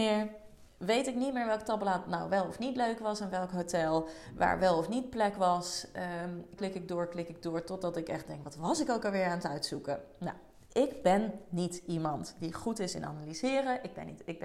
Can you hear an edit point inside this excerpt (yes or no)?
yes